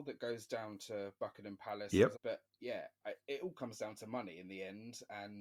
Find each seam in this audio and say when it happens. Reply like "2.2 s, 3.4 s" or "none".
2.1 s